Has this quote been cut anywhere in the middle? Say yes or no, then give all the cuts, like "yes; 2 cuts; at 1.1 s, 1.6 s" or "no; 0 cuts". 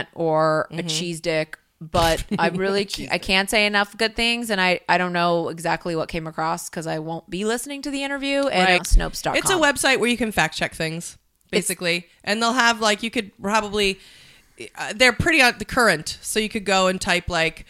yes; 1 cut; at 8.8 s